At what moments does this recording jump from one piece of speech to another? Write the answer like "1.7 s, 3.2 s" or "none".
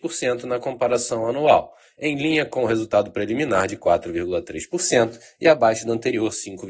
none